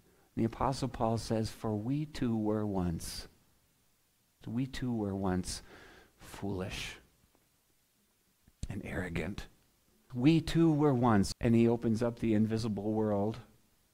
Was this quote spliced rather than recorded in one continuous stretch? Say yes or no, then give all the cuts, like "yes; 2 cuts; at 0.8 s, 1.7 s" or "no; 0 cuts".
yes; 3 cuts; at 4.4 s, 10.1 s, 11.3 s